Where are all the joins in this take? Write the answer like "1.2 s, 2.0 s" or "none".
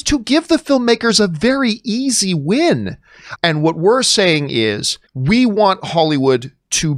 3.4 s, 5.1 s